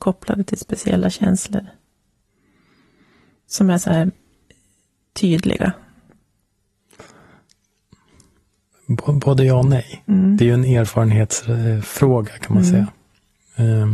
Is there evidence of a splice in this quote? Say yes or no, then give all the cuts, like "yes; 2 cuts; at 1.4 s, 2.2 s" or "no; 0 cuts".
no; 0 cuts